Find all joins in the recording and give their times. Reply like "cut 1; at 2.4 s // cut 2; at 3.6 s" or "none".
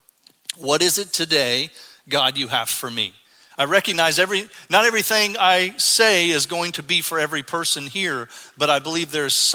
none